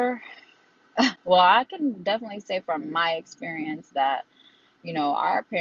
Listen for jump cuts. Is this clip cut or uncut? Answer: uncut